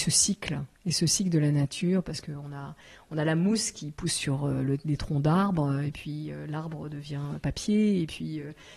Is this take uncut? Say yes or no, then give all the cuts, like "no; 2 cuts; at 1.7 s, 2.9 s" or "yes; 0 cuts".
yes; 0 cuts